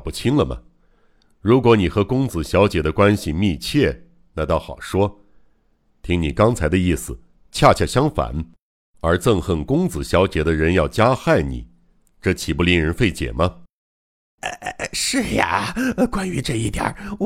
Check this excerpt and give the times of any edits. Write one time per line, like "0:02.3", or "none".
none